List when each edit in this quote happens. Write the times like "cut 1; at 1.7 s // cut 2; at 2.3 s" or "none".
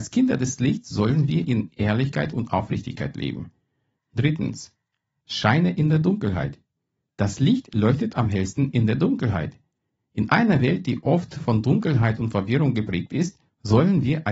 cut 1; at 4.0 s